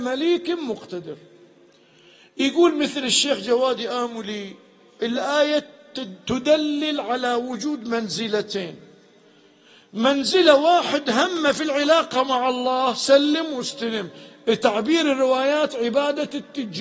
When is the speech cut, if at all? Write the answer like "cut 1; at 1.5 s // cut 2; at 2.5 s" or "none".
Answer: none